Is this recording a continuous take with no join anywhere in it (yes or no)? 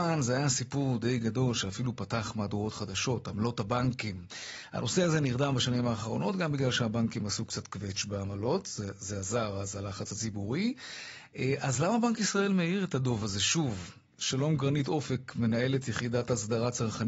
yes